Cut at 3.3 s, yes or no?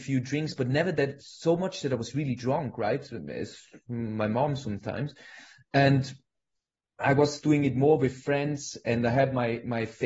no